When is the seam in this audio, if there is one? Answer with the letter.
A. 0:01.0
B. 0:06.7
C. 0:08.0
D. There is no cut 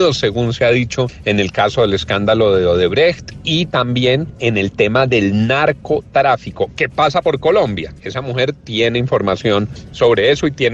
C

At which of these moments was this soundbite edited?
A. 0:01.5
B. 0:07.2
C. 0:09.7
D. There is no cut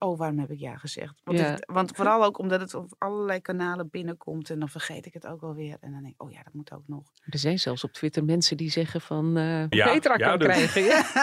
C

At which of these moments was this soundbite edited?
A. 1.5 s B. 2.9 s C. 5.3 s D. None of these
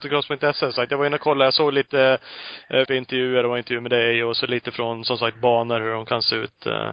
B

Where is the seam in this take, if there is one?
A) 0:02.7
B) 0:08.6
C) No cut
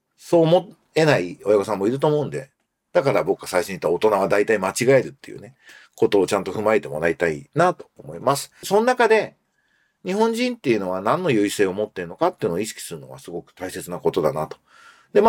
B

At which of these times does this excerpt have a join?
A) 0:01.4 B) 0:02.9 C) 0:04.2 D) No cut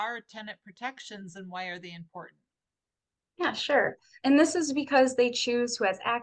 C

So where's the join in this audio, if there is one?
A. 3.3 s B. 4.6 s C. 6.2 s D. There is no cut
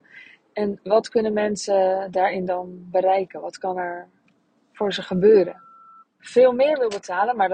C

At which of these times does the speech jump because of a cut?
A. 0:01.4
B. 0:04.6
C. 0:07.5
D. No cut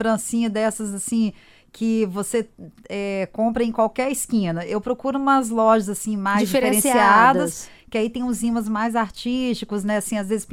D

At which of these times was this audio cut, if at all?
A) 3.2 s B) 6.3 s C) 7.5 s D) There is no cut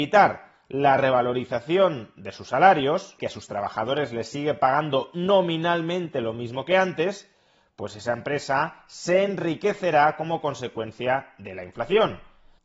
A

